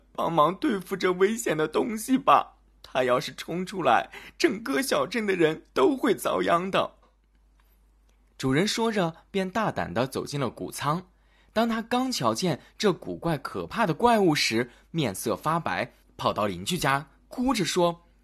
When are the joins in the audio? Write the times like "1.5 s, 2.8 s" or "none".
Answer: 7.0 s, 16.0 s